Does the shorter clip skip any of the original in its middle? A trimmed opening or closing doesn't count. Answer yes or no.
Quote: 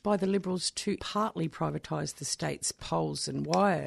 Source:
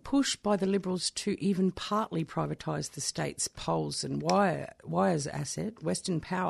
yes